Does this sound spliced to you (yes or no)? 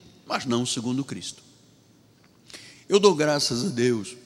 yes